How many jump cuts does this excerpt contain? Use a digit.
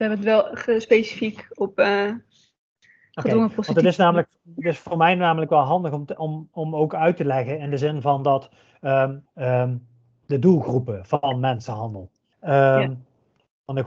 2